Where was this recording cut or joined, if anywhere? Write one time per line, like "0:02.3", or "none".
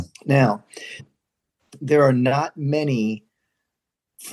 0:01.0